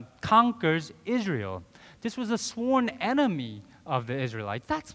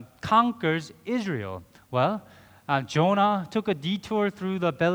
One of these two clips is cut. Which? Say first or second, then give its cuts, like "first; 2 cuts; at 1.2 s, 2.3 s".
second; 1 cut; at 1.8 s